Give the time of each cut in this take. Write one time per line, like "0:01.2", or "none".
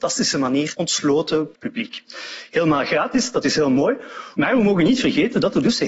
0:01.5
0:04.3